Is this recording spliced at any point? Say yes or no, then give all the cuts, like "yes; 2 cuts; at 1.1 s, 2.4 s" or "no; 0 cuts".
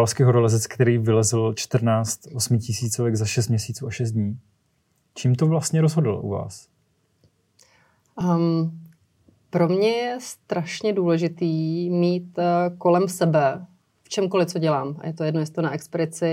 no; 0 cuts